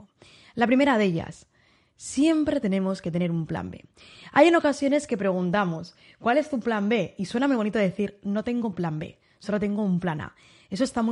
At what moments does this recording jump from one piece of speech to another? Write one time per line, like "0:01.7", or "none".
none